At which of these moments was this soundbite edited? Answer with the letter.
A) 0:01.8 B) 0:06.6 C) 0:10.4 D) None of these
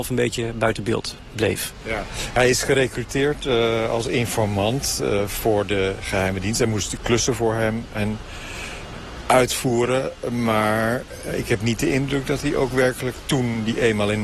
D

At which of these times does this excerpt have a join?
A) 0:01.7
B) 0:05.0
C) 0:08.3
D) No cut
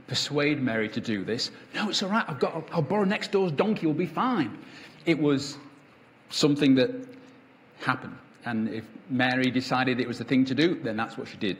D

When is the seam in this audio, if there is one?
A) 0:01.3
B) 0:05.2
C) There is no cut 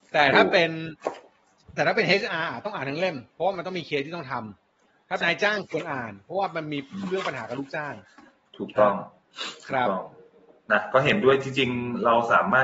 B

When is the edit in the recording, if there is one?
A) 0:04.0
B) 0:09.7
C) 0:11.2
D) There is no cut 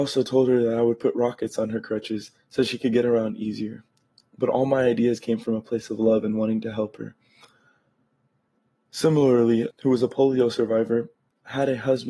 B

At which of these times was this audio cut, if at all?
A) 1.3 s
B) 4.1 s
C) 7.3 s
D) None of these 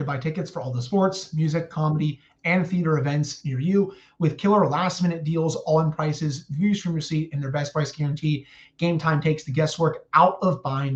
D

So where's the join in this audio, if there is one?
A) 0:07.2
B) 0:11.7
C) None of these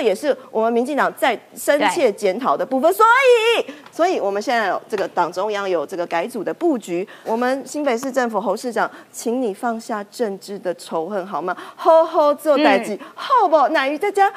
A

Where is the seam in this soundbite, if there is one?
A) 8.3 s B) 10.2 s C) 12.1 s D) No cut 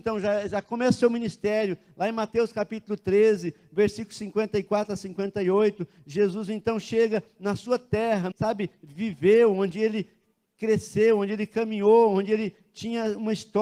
A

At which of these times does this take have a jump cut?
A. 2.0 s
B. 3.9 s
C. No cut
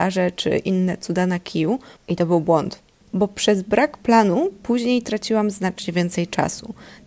A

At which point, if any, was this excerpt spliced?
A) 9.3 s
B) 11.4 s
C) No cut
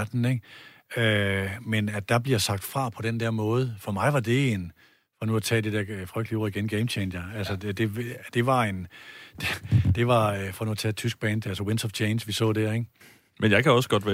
C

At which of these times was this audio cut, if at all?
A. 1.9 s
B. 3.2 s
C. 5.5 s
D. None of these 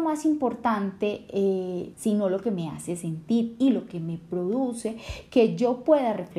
A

